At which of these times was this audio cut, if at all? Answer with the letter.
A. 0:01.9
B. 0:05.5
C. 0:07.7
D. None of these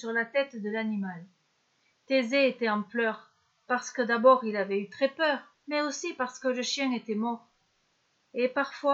B